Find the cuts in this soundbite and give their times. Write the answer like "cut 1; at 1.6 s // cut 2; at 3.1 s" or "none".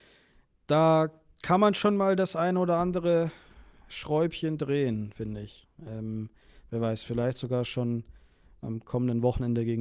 none